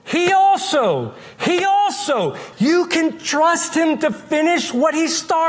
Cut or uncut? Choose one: cut